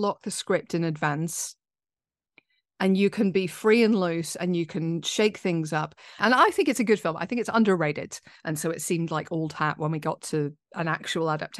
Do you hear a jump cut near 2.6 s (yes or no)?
no